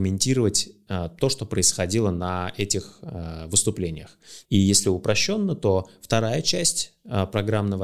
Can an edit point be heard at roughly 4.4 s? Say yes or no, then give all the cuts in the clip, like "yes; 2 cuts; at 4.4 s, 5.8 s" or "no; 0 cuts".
yes; 1 cut; at 4.4 s